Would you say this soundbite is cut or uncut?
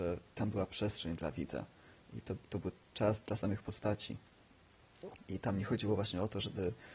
uncut